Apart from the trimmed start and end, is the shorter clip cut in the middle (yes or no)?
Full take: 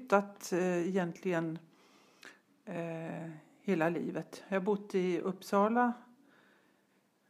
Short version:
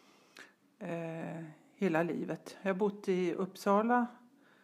no